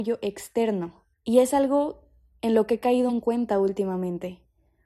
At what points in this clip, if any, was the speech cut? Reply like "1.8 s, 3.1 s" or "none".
1.1 s, 3.1 s